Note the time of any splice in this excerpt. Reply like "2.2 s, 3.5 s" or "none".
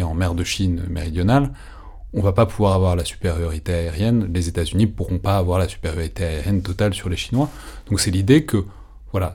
none

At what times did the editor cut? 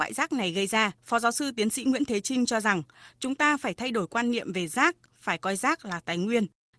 1.0 s

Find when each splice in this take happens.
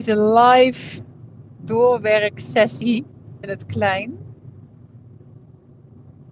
3.4 s

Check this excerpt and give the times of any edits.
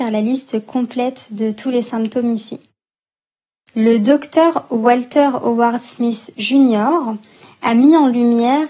none

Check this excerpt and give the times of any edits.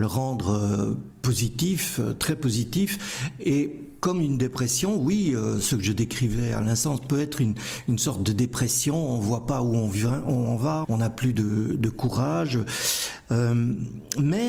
10.8 s

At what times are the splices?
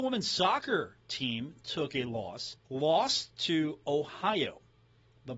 2.6 s

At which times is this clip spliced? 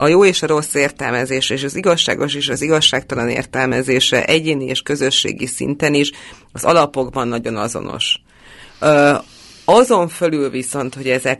none

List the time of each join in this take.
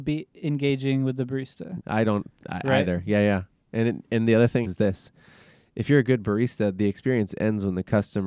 1.8 s, 4.6 s

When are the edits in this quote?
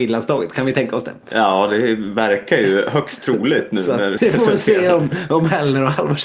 4.2 s

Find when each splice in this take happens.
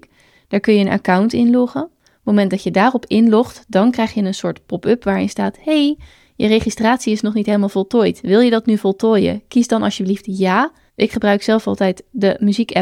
10.9 s

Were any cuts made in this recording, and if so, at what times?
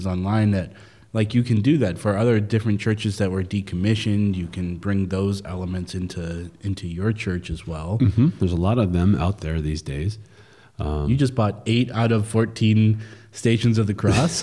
none

